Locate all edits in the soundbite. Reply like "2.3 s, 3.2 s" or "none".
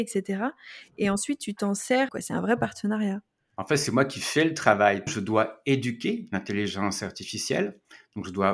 2.1 s, 5.1 s